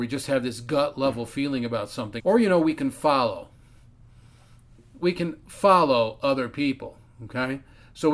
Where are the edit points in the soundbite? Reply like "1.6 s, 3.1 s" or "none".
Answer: 2.2 s